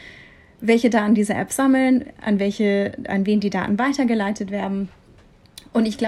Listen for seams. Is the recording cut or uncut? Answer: cut